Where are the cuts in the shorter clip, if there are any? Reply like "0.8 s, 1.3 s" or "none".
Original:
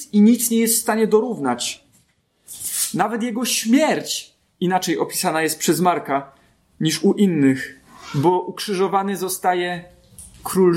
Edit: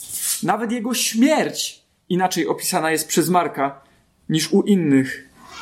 none